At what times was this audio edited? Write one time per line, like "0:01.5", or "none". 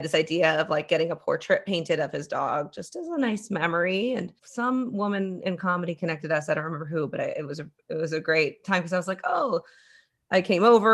0:04.4